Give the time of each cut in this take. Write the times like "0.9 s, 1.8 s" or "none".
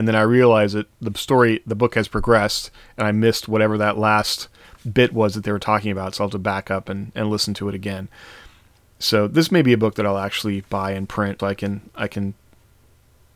11.4 s